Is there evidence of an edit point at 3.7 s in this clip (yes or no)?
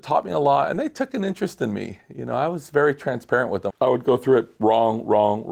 yes